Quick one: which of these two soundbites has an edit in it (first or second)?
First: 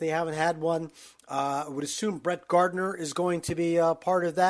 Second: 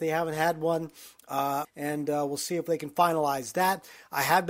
second